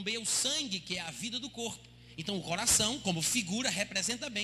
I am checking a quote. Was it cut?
no; 0 cuts

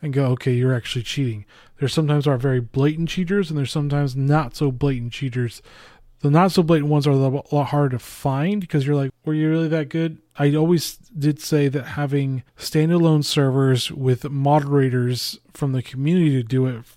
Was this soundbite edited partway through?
yes; 3 cuts; at 9.1 s, 10.4 s, 12.5 s

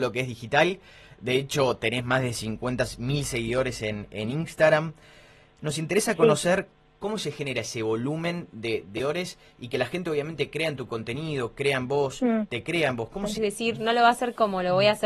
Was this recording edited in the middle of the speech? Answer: yes; 2 cuts; at 7.0 s, 13.4 s

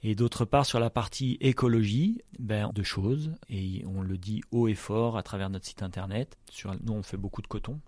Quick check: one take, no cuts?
no; 2 cuts; at 2.7 s, 6.4 s

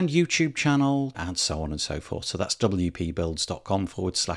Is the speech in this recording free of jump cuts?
no; 1 cut; at 1.1 s

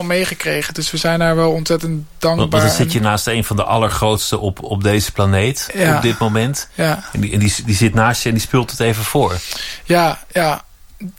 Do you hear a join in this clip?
no; 0 cuts

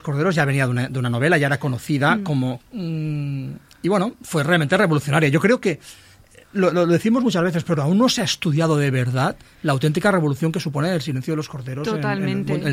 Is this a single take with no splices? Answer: no; 1 cut; at 2.6 s

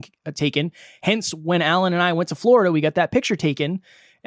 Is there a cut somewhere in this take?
no; 0 cuts

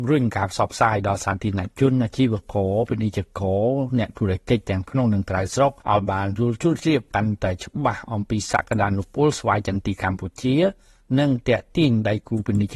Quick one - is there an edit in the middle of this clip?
yes; 1 cut; at 5.8 s

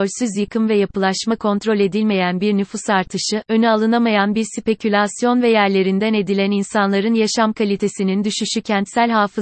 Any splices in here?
no; 0 cuts

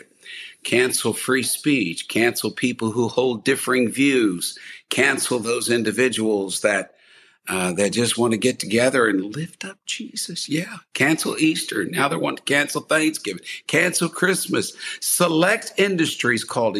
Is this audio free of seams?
yes; 0 cuts

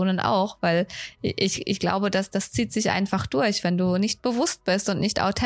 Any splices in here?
no; 0 cuts

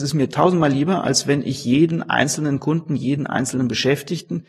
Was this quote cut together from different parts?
no; 0 cuts

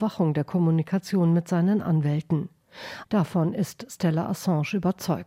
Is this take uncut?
no; 1 cut; at 3.0 s

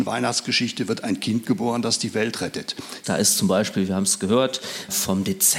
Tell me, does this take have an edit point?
yes; 1 cut; at 3.0 s

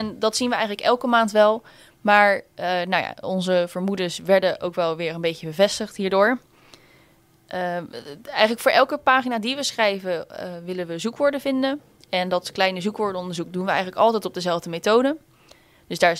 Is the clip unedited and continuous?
yes; 0 cuts

